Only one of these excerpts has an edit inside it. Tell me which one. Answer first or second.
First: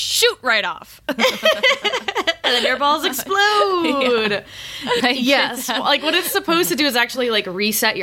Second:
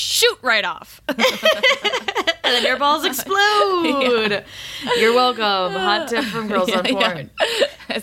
first